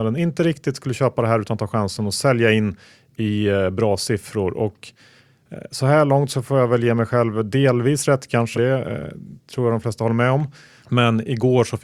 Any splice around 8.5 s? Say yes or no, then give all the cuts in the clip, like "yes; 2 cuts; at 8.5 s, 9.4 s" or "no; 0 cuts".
yes; 2 cuts; at 8.5 s, 10.8 s